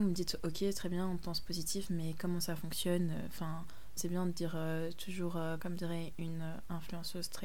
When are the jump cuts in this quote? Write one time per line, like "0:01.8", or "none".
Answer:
0:04.0
0:05.6